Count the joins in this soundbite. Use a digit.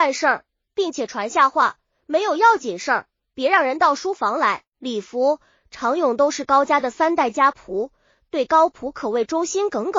1